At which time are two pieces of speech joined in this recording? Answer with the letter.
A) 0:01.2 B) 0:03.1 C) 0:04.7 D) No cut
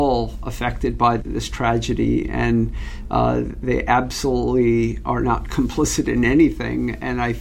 A